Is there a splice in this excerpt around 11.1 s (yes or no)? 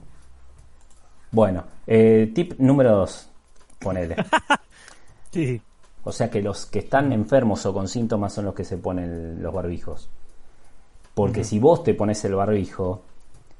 no